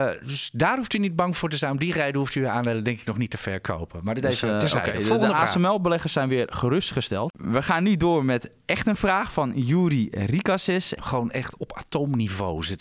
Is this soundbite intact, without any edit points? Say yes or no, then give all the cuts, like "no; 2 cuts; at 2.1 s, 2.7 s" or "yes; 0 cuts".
no; 1 cut; at 11.0 s